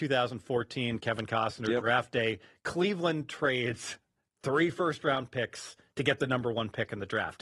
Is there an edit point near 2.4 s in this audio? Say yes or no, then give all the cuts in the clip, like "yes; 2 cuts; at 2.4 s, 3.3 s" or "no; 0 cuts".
no; 0 cuts